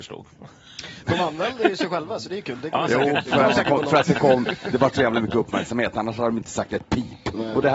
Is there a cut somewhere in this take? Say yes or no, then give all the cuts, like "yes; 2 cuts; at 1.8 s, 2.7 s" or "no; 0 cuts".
no; 0 cuts